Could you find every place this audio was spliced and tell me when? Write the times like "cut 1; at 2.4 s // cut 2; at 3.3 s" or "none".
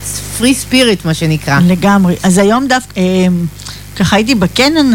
cut 1; at 2.9 s